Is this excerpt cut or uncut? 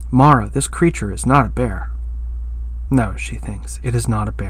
uncut